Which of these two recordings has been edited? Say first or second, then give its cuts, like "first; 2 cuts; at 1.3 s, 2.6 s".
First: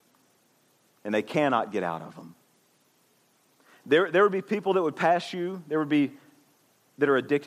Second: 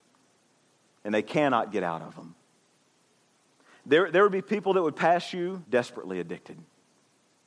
second; 1 cut; at 5.6 s